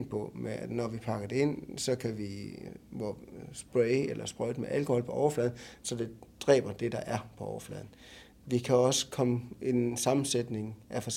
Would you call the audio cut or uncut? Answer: uncut